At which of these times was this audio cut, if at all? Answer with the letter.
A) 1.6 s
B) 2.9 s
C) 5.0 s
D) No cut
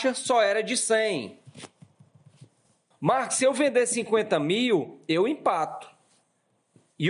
B